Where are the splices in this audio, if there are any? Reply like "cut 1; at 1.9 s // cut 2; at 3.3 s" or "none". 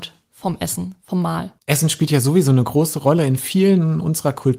cut 1; at 1.6 s